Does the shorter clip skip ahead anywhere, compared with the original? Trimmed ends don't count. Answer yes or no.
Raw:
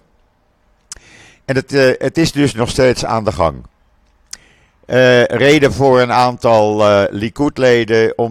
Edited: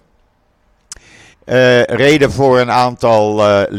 yes